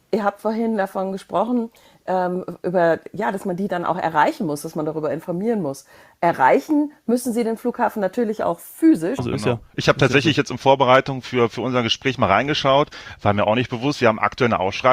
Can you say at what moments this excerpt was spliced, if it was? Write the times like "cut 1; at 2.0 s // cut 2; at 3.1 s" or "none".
cut 1; at 9.2 s